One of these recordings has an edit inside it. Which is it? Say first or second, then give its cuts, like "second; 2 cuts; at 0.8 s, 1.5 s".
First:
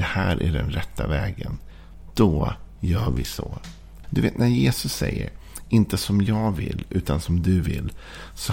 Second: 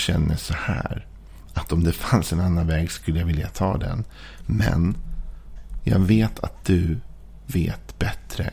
first; 1 cut; at 4.0 s